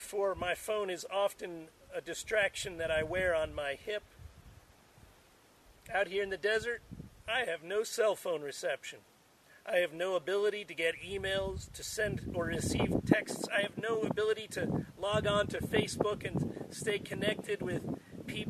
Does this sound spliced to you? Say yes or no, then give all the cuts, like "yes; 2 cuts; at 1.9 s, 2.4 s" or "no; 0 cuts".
yes; 1 cut; at 13.0 s